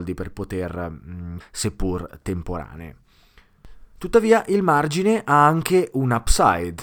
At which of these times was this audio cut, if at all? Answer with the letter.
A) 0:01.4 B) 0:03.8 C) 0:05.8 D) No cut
A